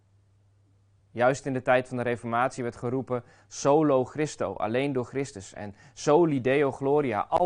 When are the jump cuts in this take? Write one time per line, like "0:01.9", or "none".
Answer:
0:01.0